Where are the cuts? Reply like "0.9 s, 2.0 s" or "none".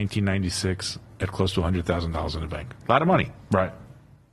1.2 s